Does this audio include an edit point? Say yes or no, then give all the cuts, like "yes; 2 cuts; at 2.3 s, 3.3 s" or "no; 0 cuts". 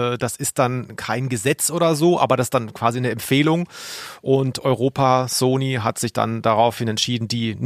no; 0 cuts